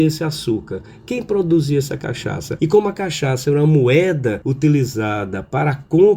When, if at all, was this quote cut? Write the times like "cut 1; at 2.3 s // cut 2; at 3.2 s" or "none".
cut 1; at 2.6 s